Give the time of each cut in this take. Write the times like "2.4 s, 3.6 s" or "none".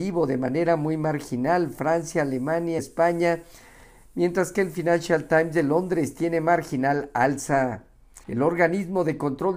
2.8 s, 8.2 s